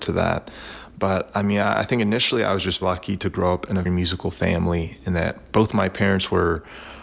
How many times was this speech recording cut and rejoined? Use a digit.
2